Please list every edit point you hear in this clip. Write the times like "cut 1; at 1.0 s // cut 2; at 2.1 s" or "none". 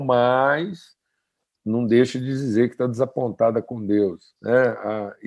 cut 1; at 4.4 s